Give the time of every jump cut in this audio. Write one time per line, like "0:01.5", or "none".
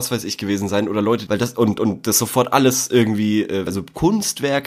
0:01.3
0:03.7